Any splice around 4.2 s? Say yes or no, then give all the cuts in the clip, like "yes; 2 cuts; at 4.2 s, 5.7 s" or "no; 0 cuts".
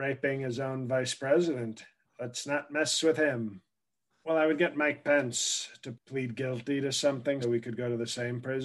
yes; 3 cuts; at 4.2 s, 5.9 s, 7.4 s